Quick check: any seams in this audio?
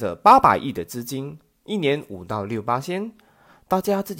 no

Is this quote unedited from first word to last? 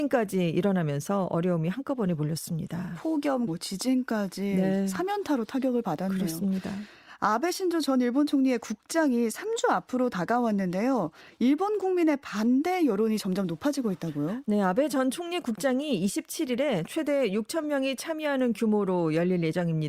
no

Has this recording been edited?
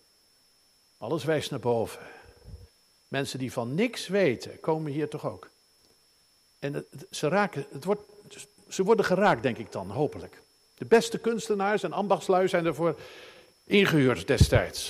no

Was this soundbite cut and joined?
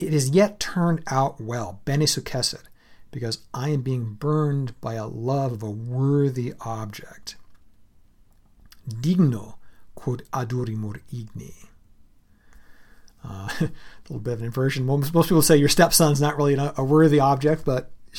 no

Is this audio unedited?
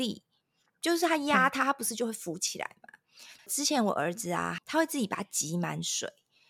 no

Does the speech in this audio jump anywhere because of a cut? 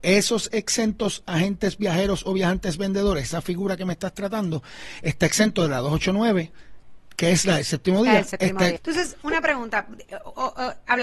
yes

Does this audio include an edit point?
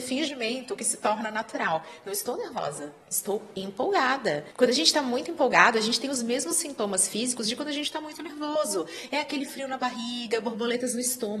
no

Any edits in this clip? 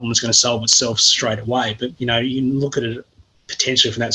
yes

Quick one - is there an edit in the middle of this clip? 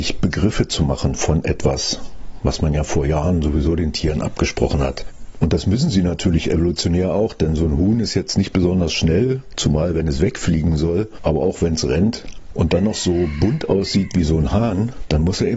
no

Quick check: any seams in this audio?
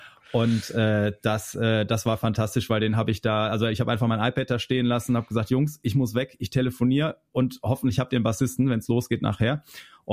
no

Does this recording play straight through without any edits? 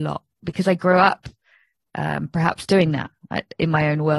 yes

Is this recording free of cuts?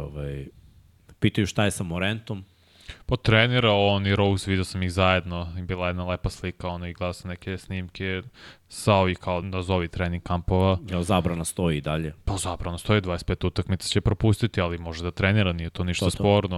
no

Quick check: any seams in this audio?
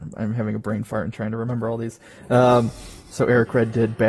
yes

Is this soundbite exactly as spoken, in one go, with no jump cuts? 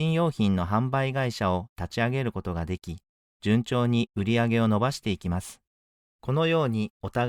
no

